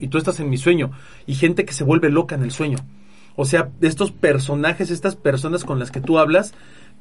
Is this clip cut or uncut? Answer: uncut